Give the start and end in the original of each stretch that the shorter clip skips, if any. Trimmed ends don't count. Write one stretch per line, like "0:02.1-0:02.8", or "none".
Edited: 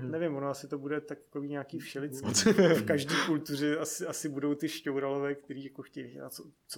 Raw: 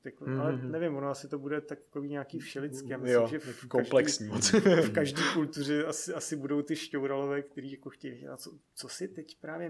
0:02.8-0:04.3